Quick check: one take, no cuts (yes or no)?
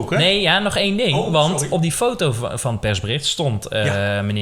yes